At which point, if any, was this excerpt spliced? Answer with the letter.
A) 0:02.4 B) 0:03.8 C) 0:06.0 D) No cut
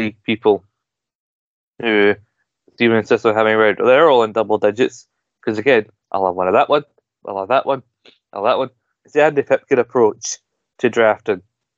C